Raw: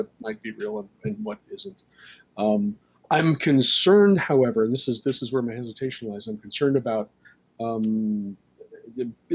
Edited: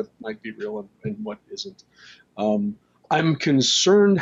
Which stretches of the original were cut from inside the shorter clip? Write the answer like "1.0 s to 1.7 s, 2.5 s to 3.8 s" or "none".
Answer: none